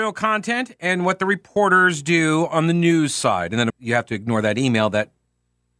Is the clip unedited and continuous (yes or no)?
no